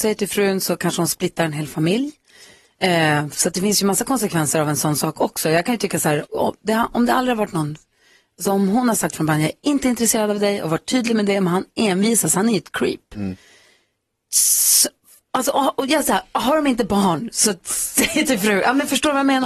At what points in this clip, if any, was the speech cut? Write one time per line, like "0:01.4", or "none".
0:06.3